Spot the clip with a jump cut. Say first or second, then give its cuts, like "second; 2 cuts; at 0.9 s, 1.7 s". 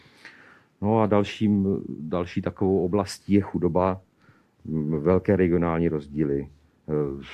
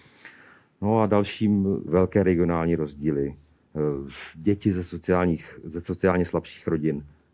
second; 1 cut; at 1.9 s